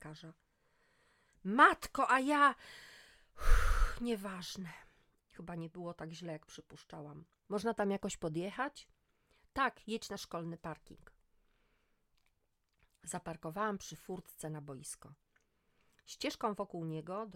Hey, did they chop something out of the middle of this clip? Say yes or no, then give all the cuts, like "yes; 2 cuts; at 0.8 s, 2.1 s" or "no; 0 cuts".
yes; 1 cut; at 5.2 s